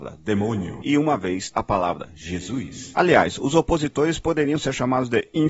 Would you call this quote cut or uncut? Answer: cut